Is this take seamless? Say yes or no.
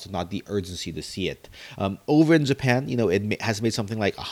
yes